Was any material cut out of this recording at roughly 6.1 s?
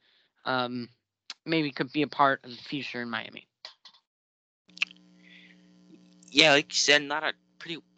no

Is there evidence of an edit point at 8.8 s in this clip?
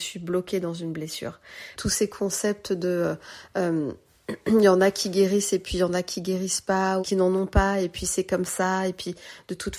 no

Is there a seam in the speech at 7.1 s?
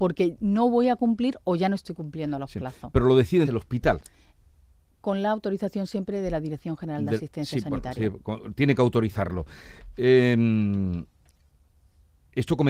no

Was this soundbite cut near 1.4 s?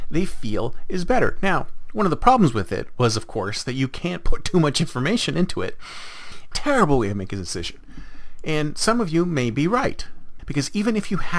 no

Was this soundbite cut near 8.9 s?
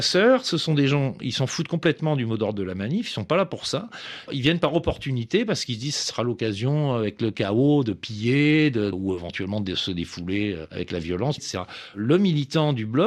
yes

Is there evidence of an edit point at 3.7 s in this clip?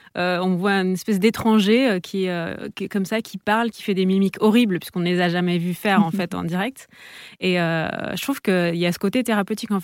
yes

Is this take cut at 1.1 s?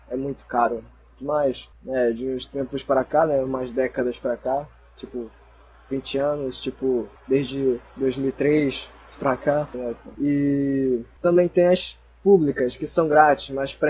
no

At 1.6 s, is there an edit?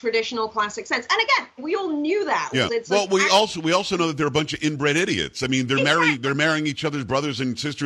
yes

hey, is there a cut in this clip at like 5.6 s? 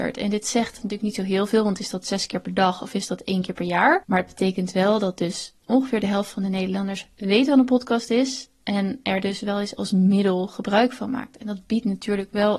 yes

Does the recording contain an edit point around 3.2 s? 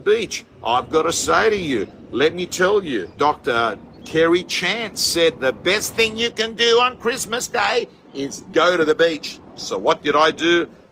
yes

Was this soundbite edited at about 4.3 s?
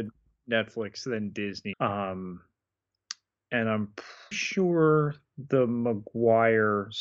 yes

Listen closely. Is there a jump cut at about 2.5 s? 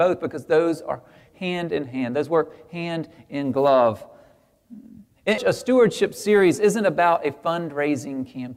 no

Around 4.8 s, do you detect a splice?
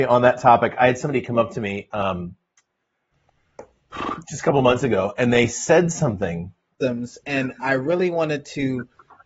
no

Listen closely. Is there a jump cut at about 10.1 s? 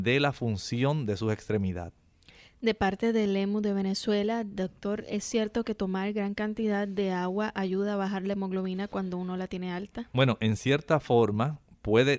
no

